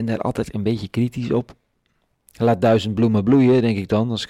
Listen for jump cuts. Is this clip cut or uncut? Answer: uncut